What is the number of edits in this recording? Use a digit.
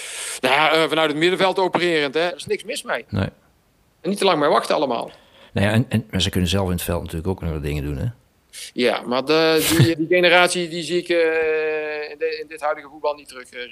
2